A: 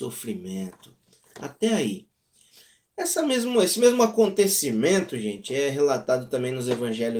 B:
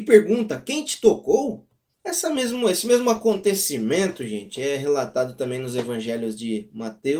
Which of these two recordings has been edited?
B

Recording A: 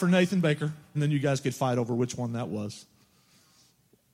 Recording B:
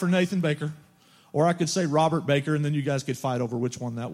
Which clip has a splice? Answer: A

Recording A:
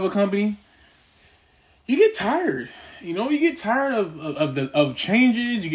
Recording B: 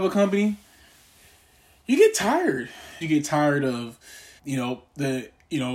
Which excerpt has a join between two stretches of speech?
B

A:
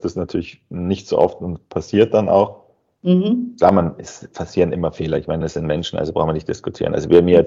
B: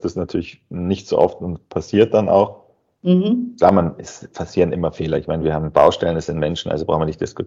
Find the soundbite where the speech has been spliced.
A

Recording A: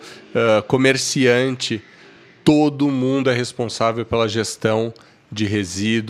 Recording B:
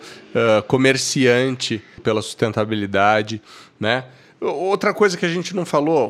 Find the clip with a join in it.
B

